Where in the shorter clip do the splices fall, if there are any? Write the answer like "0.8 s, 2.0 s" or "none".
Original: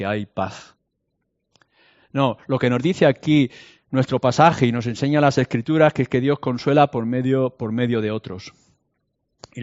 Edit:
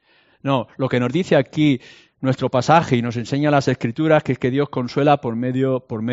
none